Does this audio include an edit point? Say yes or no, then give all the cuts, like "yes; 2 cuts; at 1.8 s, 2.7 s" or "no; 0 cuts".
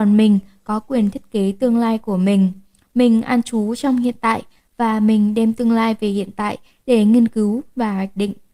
no; 0 cuts